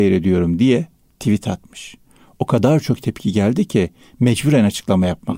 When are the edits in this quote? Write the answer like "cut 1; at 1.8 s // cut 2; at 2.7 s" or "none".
none